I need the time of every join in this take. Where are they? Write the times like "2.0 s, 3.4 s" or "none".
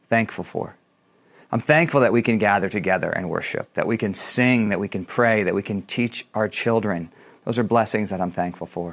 none